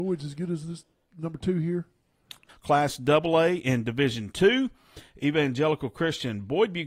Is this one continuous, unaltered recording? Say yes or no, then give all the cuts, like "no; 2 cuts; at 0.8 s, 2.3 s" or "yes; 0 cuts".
no; 1 cut; at 2.5 s